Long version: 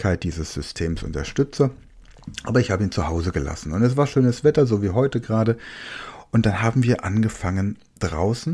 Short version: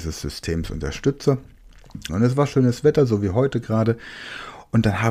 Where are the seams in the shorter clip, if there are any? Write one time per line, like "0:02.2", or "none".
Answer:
0:02.1